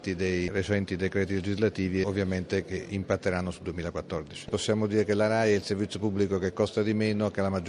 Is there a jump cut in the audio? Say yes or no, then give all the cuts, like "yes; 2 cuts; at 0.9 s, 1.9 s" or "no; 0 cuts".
yes; 1 cut; at 4.5 s